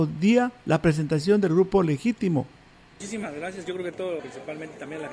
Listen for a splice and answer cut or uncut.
cut